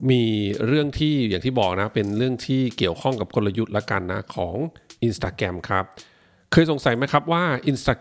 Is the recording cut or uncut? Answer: uncut